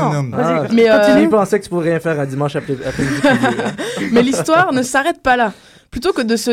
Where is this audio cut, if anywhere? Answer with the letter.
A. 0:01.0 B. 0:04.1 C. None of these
C